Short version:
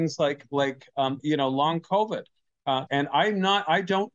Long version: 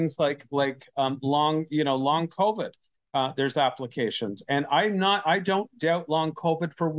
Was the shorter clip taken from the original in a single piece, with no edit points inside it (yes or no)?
no